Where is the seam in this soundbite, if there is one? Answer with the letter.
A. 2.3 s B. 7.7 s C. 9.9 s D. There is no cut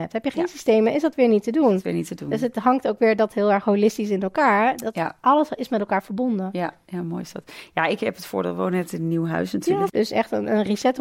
C